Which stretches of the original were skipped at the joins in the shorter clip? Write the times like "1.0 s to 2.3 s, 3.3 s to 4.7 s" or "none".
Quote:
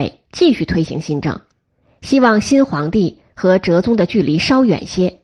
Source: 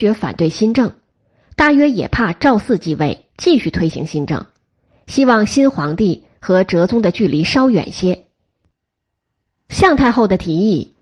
none